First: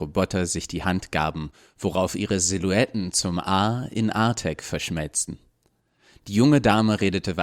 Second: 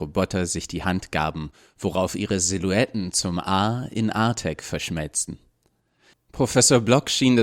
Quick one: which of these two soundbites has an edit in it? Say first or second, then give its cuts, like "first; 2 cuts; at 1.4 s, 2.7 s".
second; 1 cut; at 6.1 s